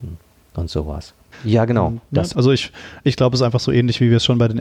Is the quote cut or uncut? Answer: cut